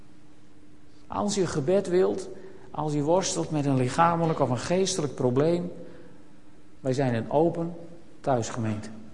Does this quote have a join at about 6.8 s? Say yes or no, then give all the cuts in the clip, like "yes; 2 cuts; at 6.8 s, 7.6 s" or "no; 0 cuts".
yes; 2 cuts; at 1.0 s, 6.8 s